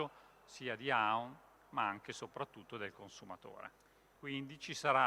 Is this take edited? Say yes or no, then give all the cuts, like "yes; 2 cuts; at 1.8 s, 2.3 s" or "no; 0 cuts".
yes; 1 cut; at 4.1 s